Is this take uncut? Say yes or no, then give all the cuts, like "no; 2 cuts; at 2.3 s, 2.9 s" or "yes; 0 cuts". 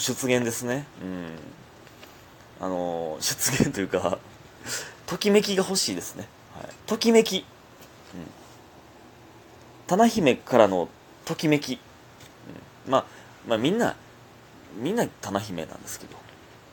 no; 1 cut; at 6.8 s